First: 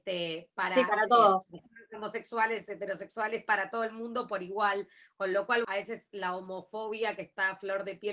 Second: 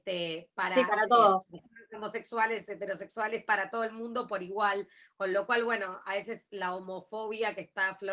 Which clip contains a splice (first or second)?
first